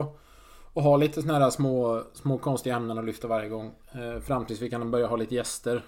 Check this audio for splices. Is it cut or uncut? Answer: uncut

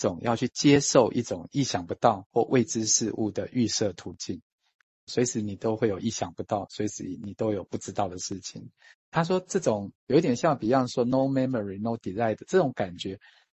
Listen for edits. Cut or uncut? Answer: cut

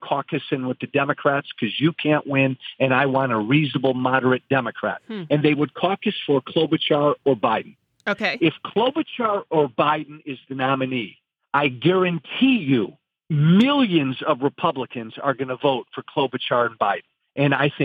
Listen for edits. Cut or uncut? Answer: uncut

